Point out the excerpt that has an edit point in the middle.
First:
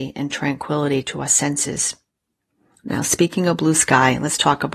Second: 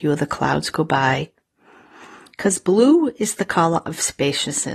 first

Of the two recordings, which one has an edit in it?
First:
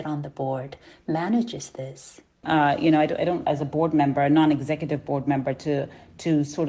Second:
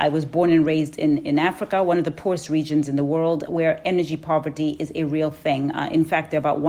first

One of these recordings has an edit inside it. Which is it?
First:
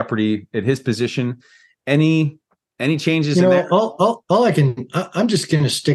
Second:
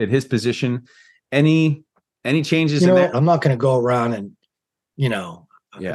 second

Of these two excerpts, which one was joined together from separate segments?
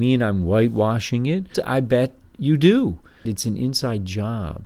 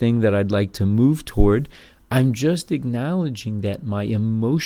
first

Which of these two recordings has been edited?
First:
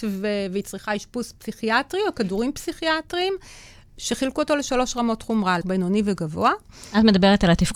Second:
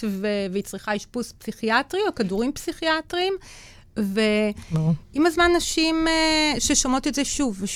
first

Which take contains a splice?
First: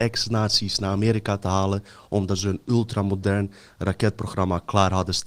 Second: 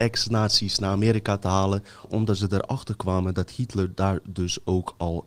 second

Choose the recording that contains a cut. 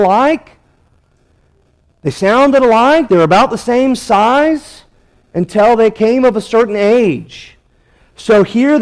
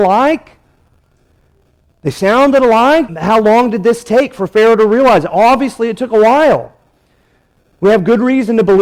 second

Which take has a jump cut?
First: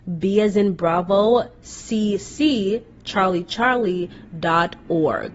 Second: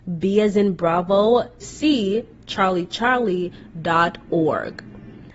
second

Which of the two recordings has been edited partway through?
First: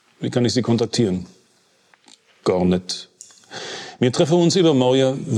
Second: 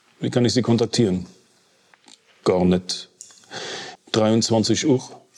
second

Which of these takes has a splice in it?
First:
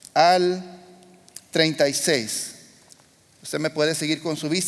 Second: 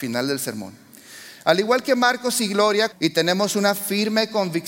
second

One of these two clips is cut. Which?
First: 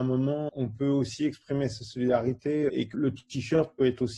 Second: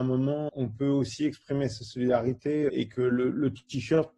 first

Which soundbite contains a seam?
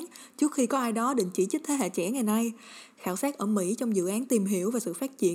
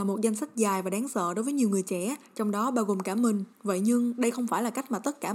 second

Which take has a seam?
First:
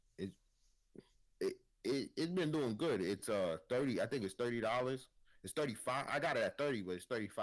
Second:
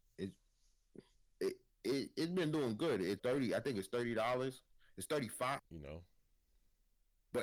second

